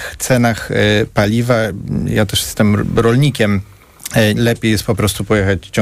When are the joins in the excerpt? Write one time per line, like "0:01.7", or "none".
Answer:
0:04.4